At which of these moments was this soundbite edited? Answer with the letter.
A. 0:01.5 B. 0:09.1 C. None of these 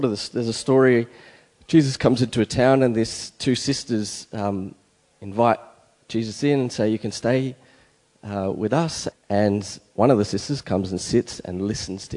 B